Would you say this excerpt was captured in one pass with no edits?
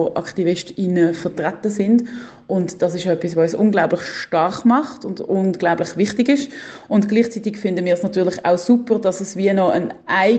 yes; 0 cuts

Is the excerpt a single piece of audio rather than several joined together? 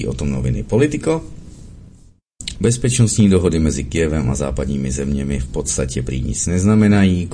no; 1 cut; at 2.5 s

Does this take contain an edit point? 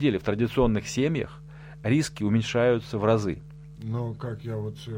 yes; 1 cut; at 3.7 s

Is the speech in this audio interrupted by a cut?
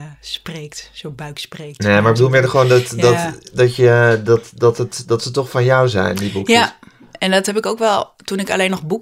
no; 0 cuts

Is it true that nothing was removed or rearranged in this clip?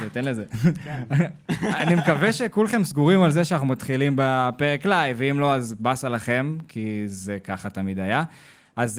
yes; 0 cuts

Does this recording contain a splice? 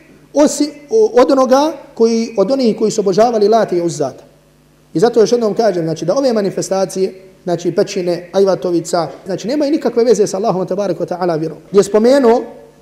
yes; 3 cuts; at 4.8 s, 9.3 s, 11.7 s

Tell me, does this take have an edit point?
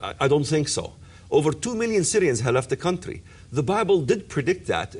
yes; 1 cut; at 1.2 s

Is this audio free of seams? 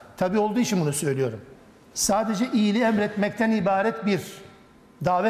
no; 1 cut; at 1.9 s

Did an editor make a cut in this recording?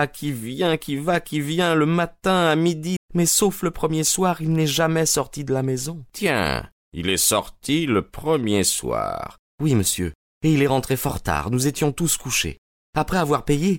yes; 1 cut; at 3.0 s

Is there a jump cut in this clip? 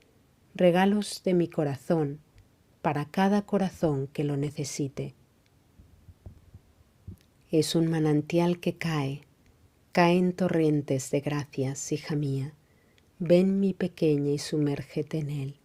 no; 0 cuts

